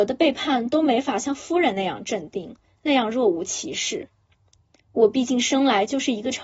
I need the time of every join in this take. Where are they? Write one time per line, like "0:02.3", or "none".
none